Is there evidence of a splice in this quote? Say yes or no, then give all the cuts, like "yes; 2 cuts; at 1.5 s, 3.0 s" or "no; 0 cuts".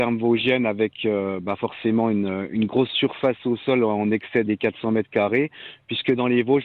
yes; 1 cut; at 4.5 s